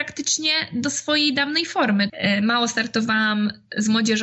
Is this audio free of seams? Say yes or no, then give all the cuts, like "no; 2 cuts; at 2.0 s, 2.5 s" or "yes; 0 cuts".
no; 1 cut; at 2.1 s